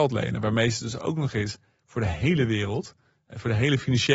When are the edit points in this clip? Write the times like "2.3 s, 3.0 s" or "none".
none

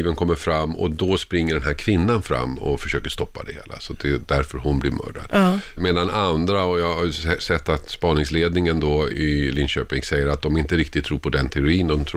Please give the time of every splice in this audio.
5.8 s, 9.1 s

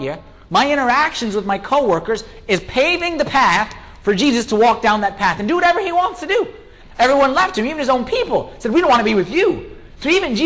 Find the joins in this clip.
6.8 s

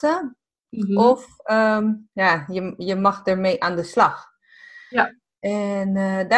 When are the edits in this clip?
none

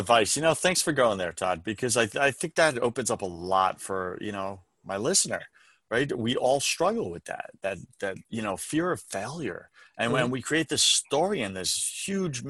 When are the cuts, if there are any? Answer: 8.2 s

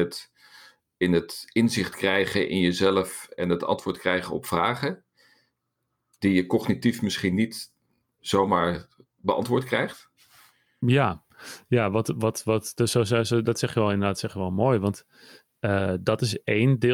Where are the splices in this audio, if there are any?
none

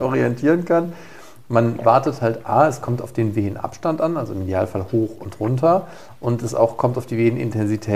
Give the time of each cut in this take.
none

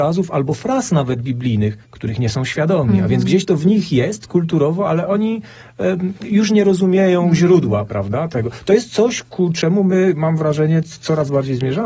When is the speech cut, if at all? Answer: none

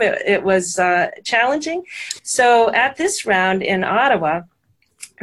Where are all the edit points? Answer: 2.2 s

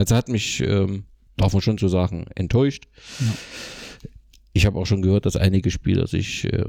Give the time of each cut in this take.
none

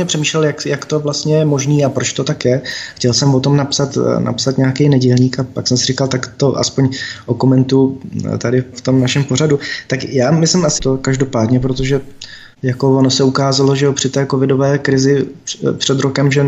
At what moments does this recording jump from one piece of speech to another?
10.8 s

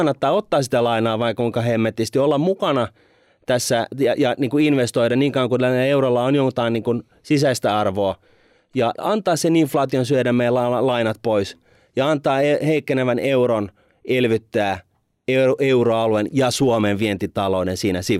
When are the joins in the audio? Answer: 8.9 s

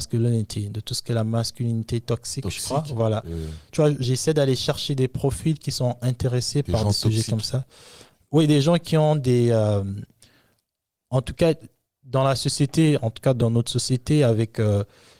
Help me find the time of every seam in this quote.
none

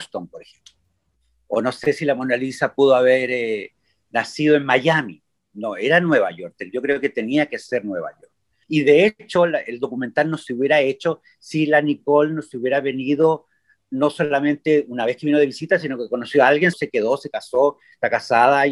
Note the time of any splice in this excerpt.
8.6 s, 16.7 s

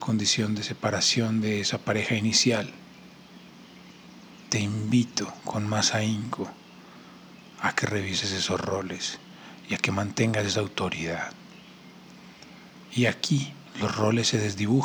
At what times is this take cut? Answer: 12.9 s

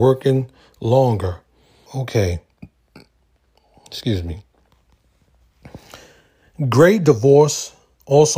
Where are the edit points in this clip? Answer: 1.9 s

